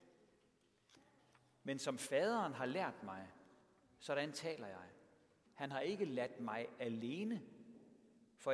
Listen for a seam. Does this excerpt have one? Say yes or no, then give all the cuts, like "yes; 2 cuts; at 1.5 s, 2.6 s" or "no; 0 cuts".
yes; 1 cut; at 5.5 s